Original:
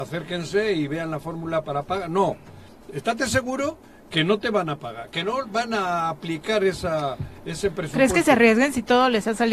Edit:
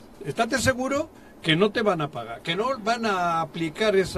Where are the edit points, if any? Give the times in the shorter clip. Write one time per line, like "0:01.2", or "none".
none